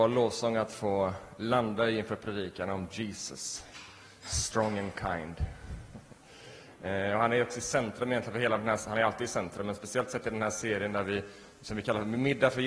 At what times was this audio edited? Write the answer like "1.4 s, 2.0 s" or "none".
none